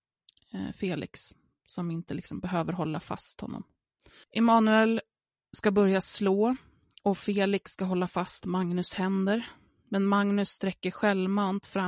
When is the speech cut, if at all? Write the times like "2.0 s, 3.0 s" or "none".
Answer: 4.2 s